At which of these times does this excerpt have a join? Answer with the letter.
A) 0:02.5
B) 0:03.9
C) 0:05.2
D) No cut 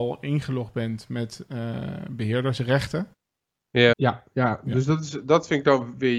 B